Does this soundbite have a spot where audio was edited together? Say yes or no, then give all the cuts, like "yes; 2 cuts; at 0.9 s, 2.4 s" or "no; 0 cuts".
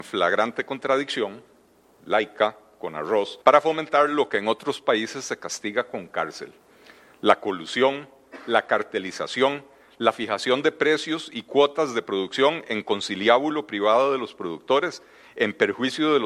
yes; 1 cut; at 3.4 s